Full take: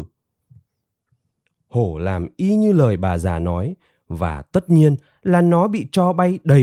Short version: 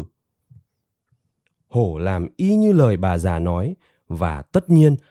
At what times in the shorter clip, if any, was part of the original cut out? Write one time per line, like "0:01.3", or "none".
none